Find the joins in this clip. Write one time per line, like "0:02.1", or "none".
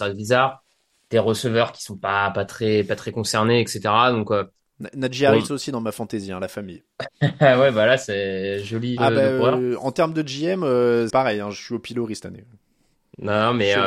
0:09.0
0:11.1